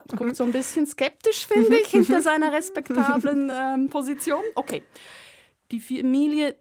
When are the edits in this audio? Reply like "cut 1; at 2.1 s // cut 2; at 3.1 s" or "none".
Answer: none